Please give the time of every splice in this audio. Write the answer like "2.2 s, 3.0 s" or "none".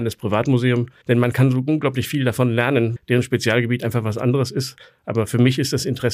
1.0 s, 3.0 s